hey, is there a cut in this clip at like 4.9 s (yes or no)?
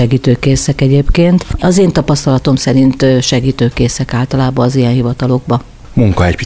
no